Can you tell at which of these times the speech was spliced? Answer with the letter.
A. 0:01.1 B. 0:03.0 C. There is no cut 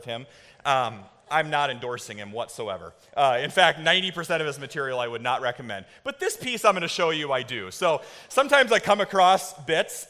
C